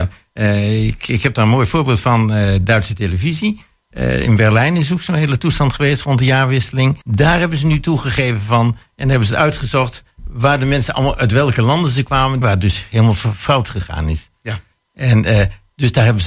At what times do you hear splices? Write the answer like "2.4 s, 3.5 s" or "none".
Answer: 7.0 s, 12.4 s